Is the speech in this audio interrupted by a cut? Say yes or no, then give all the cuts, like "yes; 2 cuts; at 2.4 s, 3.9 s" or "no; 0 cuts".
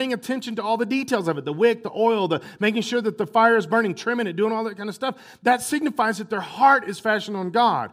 no; 0 cuts